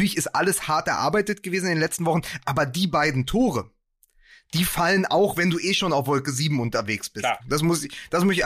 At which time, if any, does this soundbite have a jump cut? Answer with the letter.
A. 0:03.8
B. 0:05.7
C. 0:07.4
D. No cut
C